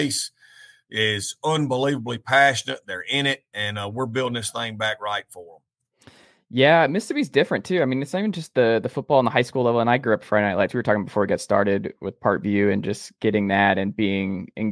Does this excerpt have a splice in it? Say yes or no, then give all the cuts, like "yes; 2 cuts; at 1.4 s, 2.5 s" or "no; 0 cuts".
no; 0 cuts